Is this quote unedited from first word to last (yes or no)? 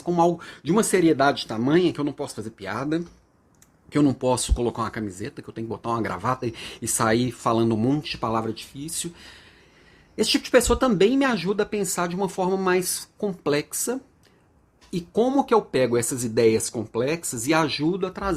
yes